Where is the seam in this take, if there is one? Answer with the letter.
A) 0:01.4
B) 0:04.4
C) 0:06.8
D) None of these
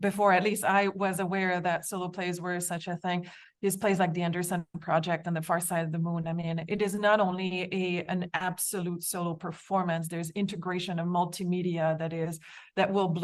D